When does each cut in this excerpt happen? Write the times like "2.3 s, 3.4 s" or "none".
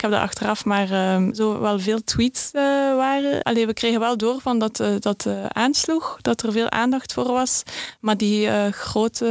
1.3 s, 3.4 s